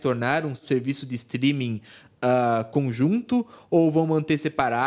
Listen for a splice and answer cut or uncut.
uncut